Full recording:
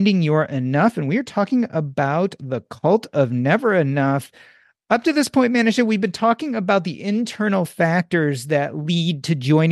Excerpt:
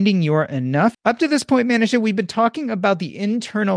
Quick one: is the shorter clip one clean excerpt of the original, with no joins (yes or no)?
no